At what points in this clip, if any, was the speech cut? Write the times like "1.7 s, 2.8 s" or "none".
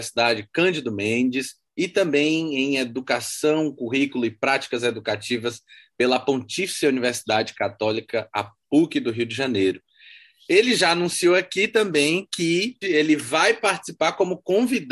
12.8 s

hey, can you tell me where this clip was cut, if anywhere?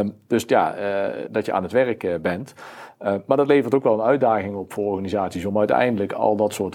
1.3 s

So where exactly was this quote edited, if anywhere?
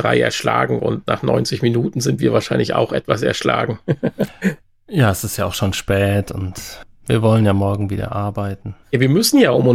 none

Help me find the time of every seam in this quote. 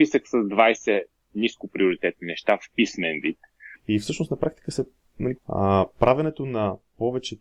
3.7 s, 5.4 s

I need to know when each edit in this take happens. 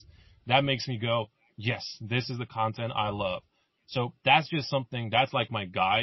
none

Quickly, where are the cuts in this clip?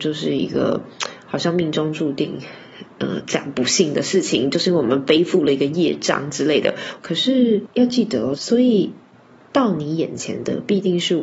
7.0 s, 8.4 s

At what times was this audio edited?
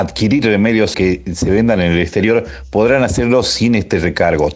0.9 s

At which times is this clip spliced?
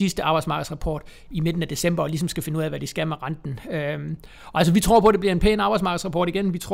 1.3 s

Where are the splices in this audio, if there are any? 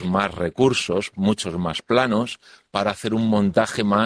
none

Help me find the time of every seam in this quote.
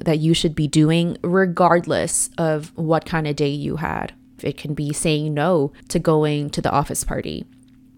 4.4 s, 5.8 s

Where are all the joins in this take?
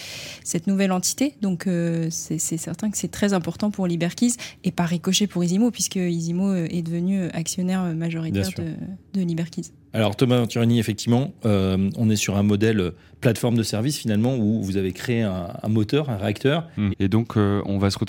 16.9 s

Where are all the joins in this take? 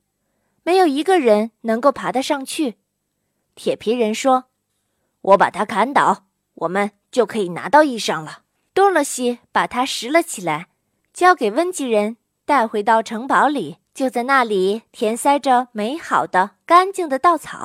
8.6 s, 13.8 s

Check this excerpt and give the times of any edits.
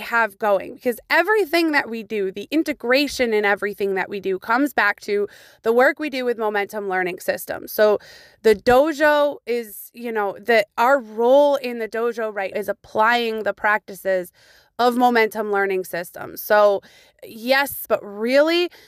12.5 s, 17.9 s

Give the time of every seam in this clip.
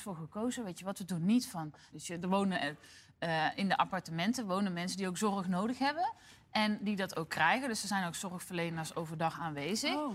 1.9 s

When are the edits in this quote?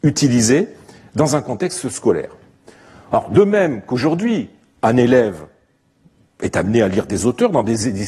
none

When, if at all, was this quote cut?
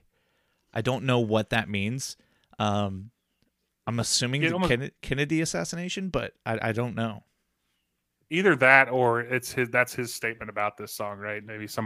none

